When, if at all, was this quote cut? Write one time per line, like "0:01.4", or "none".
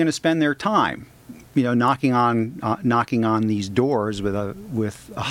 none